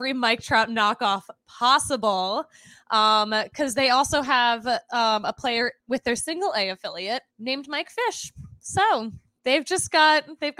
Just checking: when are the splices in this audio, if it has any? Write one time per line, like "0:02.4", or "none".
0:05.8
0:07.3